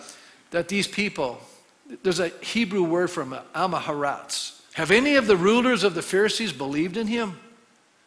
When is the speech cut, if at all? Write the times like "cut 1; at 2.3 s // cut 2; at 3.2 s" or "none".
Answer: cut 1; at 4.7 s